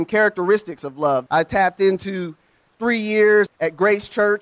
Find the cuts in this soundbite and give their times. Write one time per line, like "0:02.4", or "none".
0:01.3
0:03.5